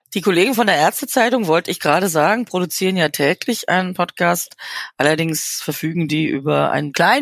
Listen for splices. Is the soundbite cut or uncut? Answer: uncut